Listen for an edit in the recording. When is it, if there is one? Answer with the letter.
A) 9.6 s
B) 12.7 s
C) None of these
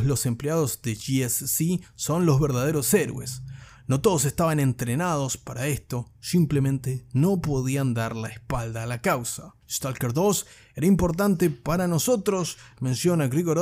A